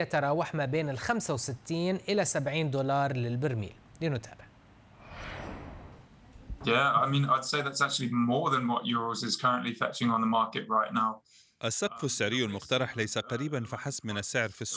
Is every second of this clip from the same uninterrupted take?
yes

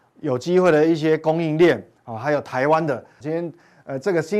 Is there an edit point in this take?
yes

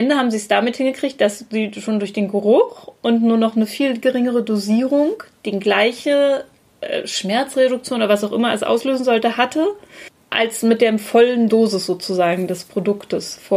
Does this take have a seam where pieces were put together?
no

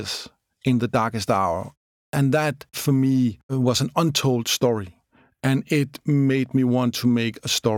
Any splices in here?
no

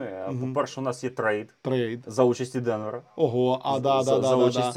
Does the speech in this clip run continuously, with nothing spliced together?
no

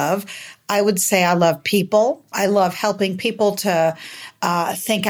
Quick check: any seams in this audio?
yes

